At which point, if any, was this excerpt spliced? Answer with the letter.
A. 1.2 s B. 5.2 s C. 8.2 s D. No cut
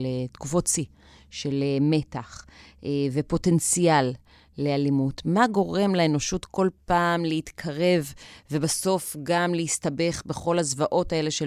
D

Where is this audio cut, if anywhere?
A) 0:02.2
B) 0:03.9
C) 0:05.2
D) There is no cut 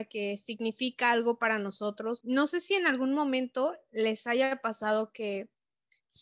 A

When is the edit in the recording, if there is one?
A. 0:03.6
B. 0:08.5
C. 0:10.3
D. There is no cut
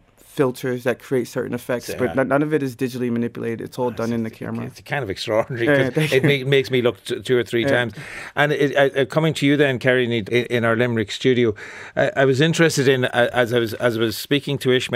C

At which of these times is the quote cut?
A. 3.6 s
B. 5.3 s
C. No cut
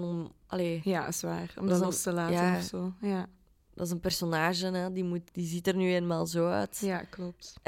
B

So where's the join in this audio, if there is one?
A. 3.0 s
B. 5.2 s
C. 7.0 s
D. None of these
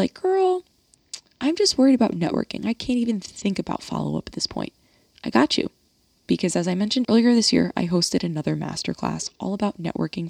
C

